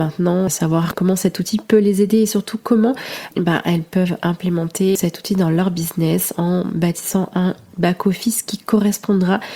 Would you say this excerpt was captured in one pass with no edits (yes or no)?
yes